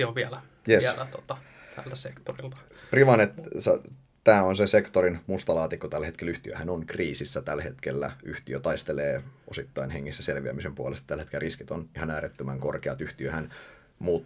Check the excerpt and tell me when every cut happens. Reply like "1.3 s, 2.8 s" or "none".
none